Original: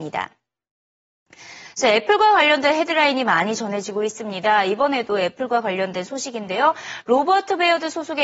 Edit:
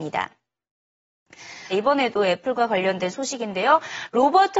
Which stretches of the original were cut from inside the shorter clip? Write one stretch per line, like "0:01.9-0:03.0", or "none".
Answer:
0:01.7-0:04.6